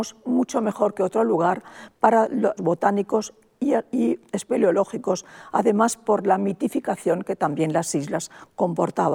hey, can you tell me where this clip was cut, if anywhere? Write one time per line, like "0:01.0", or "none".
0:02.6